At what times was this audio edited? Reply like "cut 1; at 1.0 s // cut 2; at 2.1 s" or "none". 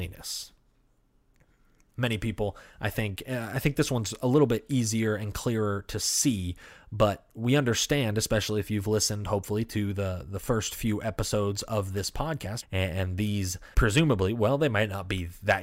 cut 1; at 12.6 s // cut 2; at 13.7 s